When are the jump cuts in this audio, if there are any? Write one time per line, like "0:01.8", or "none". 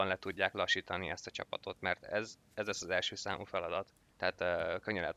0:04.1